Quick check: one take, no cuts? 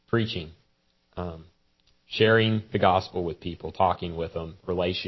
yes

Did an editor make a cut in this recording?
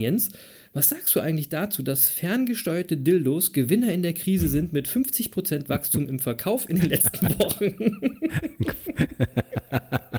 no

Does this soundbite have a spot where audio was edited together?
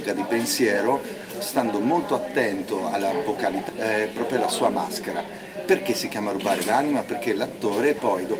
yes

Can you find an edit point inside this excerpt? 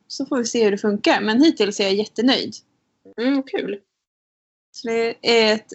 no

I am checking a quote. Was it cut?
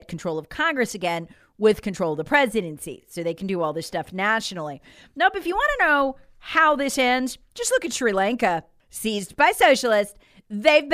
no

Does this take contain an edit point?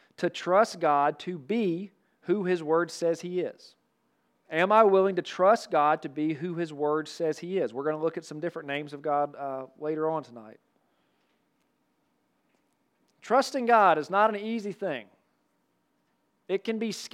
yes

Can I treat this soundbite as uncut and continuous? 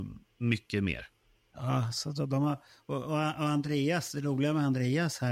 yes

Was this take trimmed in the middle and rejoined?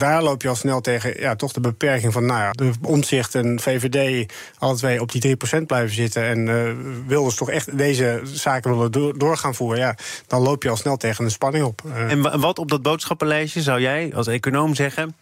yes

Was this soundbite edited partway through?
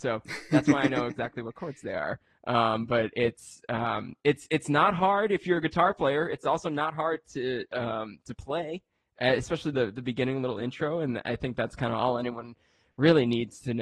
no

